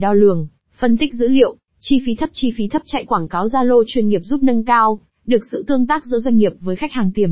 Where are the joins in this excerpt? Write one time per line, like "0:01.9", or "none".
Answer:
0:01.7